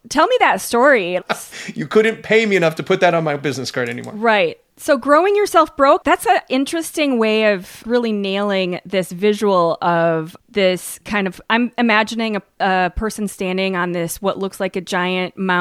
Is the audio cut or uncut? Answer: cut